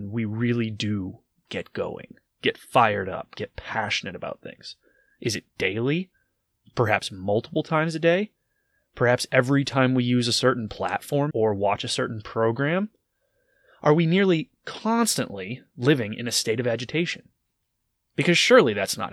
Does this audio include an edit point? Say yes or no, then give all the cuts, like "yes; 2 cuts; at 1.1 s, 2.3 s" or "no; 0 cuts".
yes; 2 cuts; at 1.4 s, 11.3 s